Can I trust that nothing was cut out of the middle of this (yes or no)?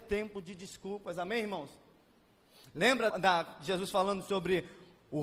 no